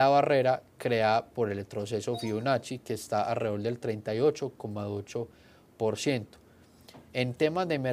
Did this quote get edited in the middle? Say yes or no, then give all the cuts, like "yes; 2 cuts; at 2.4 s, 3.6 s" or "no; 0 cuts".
no; 0 cuts